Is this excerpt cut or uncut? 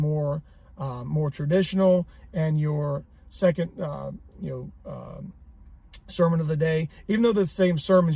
uncut